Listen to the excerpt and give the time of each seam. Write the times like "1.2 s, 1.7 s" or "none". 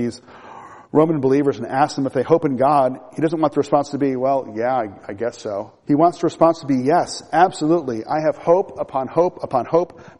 5.8 s